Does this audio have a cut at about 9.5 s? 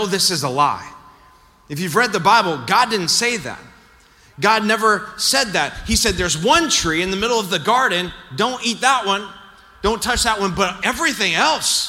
no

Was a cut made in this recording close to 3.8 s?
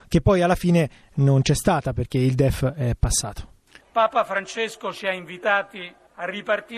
yes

